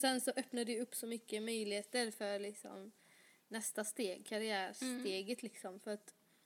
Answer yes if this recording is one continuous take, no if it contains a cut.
yes